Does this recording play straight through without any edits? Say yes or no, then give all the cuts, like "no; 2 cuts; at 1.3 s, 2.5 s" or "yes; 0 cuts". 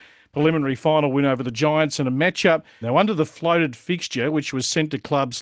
no; 1 cut; at 2.8 s